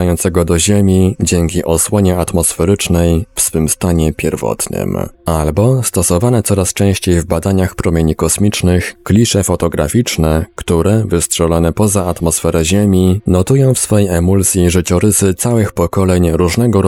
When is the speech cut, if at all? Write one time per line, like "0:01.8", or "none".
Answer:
0:05.1